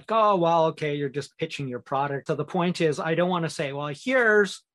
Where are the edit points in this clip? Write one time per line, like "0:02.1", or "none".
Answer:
0:02.3